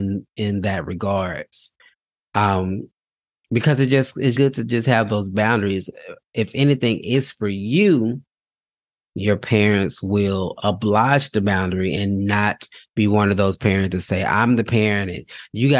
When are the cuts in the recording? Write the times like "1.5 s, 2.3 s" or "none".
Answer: 4.3 s, 9.0 s